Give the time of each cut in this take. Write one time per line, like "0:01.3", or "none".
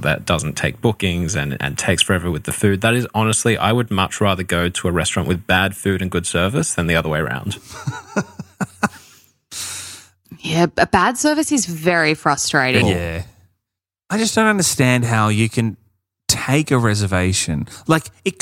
0:12.8